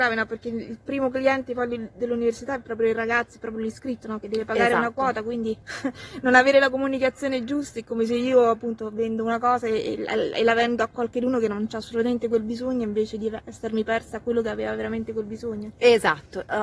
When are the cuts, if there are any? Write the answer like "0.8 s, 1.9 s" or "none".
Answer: 5.6 s